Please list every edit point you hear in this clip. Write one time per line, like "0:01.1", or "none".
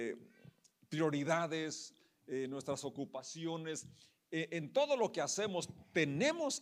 none